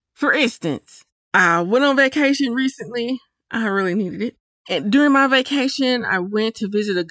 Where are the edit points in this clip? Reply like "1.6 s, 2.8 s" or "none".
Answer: none

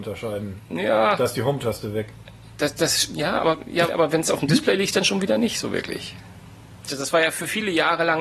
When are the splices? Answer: 3.9 s, 6.9 s

